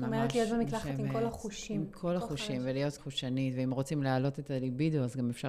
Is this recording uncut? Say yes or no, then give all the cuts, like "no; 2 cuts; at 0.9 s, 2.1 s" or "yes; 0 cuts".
no; 1 cut; at 3.0 s